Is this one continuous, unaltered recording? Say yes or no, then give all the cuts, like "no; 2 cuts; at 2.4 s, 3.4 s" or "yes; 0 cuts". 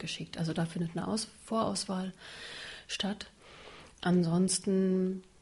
yes; 0 cuts